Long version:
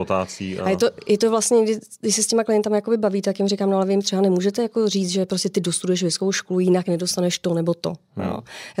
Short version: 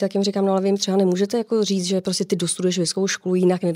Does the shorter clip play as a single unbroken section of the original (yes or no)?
yes